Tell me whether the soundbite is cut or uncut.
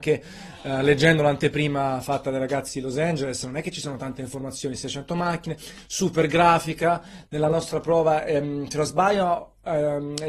uncut